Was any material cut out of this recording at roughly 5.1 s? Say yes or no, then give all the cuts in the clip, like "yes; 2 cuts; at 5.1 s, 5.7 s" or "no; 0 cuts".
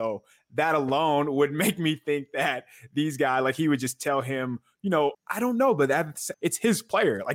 yes; 2 cuts; at 5.1 s, 6.3 s